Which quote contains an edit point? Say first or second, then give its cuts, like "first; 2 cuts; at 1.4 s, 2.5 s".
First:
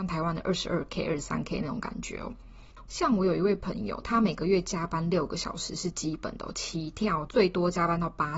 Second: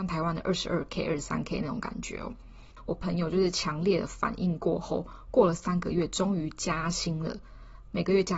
first; 2 cuts; at 2.9 s, 7.3 s